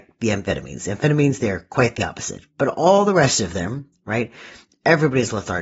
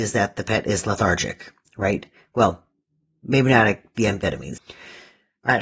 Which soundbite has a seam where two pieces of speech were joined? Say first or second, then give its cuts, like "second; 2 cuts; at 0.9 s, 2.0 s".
second; 1 cut; at 4.6 s